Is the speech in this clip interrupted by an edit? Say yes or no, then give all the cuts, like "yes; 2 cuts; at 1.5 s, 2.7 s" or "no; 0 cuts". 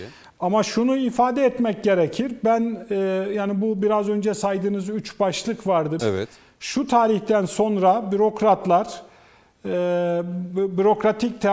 yes; 1 cut; at 6.0 s